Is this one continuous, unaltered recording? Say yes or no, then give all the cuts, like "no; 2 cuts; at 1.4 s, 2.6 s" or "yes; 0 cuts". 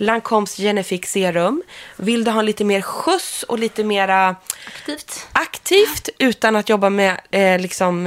yes; 0 cuts